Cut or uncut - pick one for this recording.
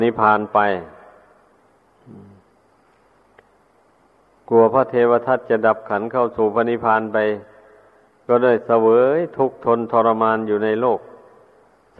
uncut